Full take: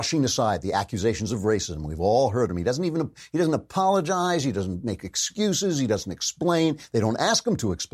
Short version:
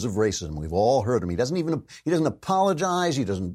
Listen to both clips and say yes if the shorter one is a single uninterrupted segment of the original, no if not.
yes